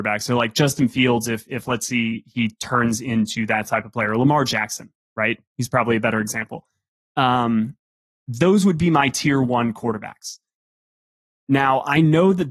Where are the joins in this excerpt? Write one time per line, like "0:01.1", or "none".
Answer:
none